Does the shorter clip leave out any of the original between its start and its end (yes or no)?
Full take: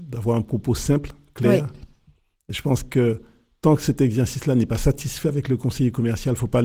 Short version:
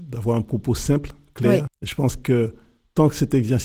yes